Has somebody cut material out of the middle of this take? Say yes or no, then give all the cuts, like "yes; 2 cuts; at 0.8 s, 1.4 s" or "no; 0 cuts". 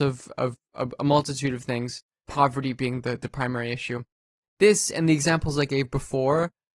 yes; 1 cut; at 2.3 s